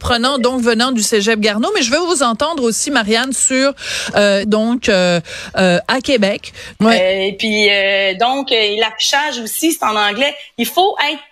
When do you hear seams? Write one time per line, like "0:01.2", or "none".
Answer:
0:04.4
0:06.7